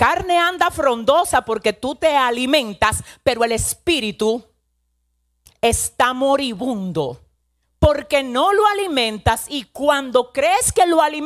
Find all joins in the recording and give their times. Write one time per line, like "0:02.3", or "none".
none